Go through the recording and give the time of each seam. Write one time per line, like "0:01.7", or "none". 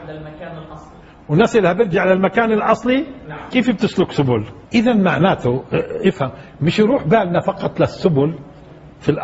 0:03.5
0:04.7